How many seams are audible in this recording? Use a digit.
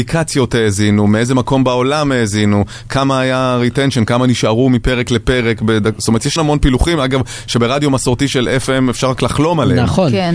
1